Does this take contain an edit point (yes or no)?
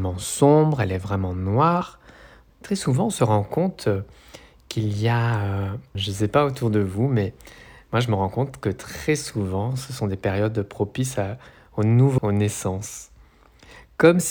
yes